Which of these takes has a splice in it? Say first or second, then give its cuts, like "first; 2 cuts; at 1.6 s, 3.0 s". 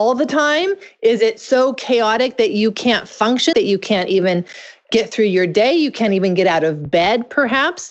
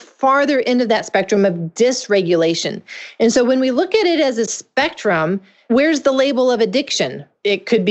first; 1 cut; at 3.5 s